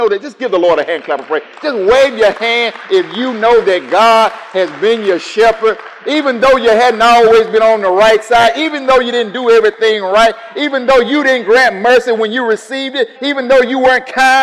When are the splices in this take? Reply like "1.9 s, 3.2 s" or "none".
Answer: 13.2 s

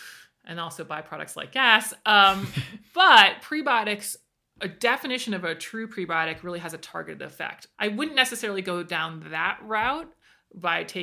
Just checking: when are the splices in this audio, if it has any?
7.7 s

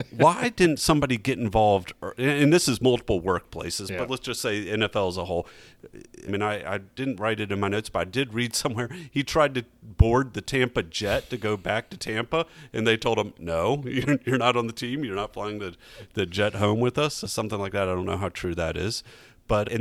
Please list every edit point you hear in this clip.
6.3 s

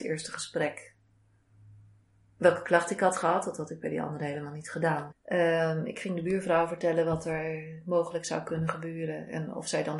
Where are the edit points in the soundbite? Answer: 5.1 s

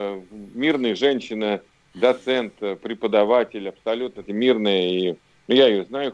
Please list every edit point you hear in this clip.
4.2 s

